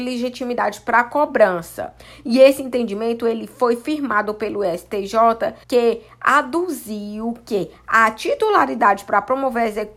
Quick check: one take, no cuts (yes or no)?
no